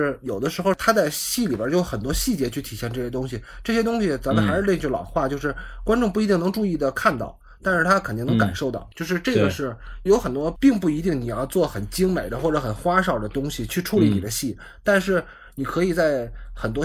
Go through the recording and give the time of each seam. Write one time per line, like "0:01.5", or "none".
0:10.1